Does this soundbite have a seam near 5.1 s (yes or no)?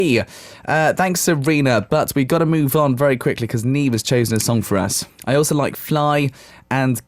yes